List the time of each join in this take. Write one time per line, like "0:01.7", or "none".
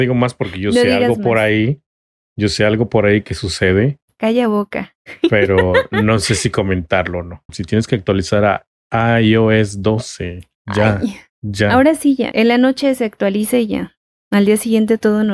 0:07.5
0:12.3